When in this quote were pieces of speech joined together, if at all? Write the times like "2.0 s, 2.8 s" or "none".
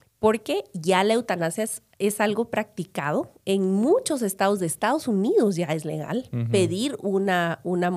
none